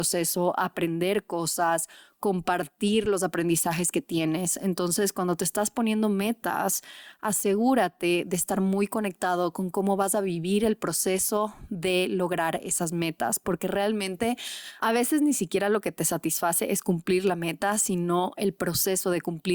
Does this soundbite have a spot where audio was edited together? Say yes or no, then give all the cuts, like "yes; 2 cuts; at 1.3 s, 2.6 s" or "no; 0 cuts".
no; 0 cuts